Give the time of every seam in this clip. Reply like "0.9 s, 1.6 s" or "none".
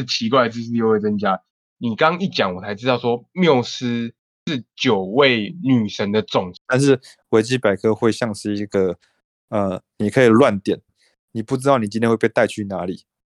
6.7 s, 10.9 s